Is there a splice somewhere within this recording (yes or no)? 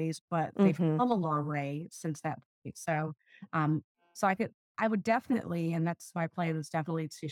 no